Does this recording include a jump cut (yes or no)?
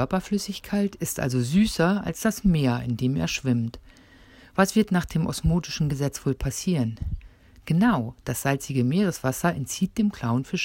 no